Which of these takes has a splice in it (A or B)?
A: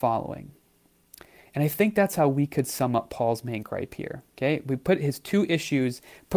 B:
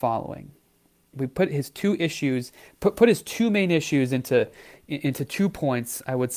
B